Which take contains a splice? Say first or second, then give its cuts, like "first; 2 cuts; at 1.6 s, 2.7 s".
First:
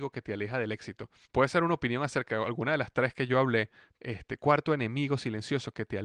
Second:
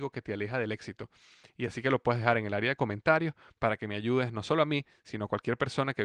first; 2 cuts; at 1.2 s, 4.0 s